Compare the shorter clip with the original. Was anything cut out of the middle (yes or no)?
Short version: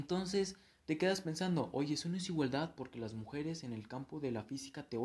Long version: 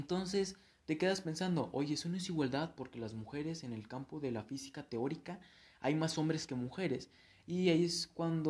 no